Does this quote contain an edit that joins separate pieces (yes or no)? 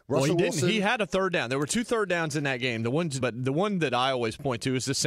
yes